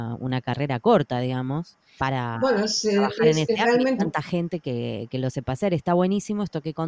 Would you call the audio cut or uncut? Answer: cut